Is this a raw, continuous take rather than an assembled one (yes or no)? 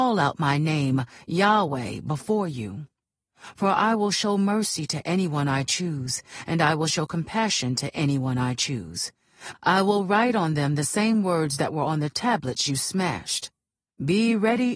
no